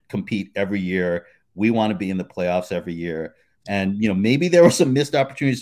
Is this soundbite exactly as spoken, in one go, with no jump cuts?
no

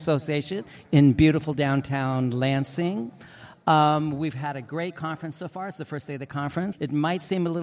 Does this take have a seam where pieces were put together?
yes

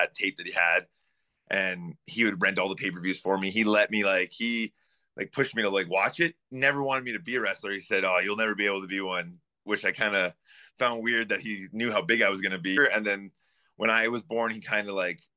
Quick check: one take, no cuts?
no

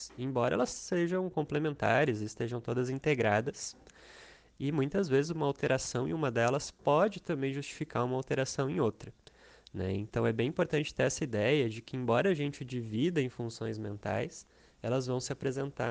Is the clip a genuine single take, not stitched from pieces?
yes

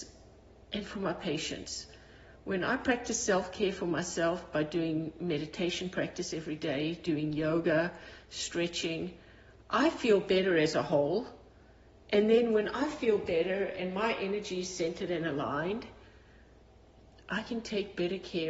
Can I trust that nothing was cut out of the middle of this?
yes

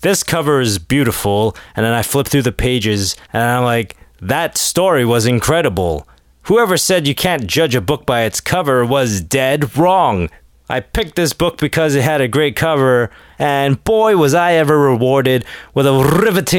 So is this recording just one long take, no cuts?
yes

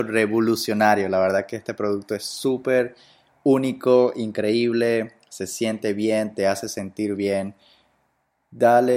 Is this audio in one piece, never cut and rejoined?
yes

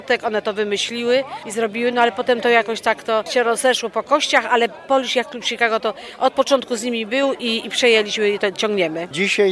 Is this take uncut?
yes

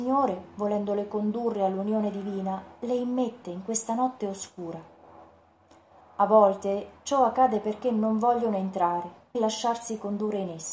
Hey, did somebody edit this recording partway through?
yes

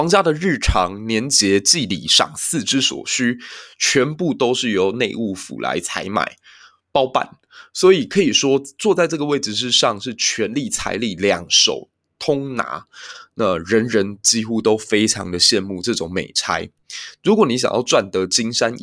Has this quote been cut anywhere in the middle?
no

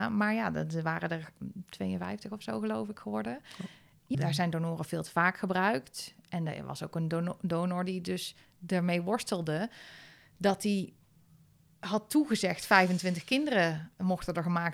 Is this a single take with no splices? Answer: no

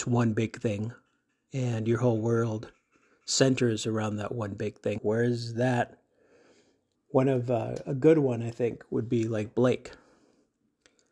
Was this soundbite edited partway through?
yes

